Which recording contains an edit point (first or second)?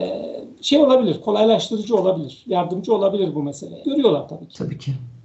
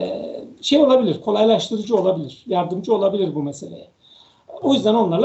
first